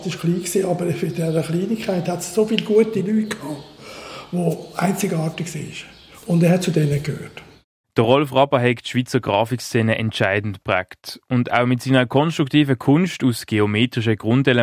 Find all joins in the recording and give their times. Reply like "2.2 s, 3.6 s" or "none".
none